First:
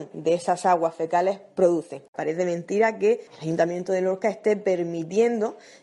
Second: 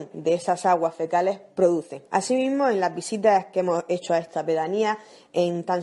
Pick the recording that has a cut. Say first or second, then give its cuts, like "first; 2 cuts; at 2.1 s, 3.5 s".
first; 2 cuts; at 2.1 s, 3.3 s